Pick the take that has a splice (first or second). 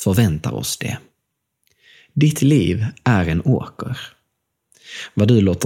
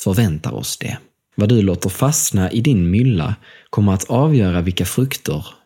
second